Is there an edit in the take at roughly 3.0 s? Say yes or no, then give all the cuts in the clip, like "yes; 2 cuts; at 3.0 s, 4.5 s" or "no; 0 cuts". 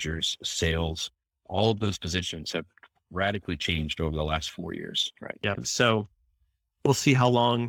no; 1 cut; at 5.6 s